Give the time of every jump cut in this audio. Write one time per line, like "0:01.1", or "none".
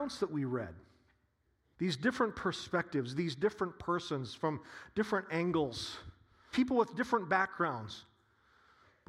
0:01.7
0:06.5